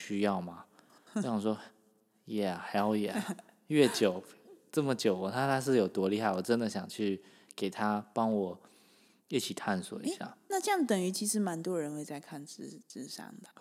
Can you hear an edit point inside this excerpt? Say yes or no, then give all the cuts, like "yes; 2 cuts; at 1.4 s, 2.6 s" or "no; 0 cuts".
no; 0 cuts